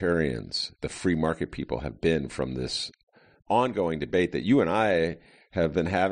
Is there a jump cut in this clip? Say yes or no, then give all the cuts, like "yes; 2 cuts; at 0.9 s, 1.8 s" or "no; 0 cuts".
no; 0 cuts